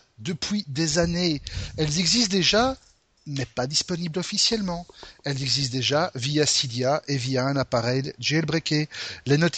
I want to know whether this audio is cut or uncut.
uncut